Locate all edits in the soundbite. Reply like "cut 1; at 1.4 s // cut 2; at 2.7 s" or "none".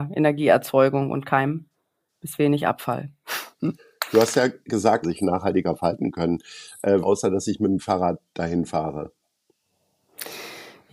cut 1; at 5.0 s // cut 2; at 7.0 s